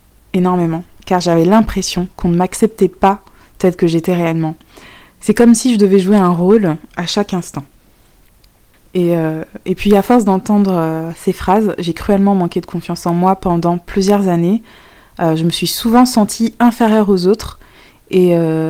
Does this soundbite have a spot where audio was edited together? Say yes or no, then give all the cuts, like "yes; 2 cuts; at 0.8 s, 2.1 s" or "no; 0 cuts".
no; 0 cuts